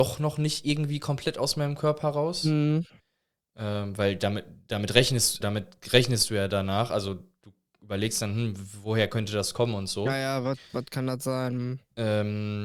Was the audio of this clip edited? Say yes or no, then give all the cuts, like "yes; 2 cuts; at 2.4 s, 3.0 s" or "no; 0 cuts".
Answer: yes; 1 cut; at 5.4 s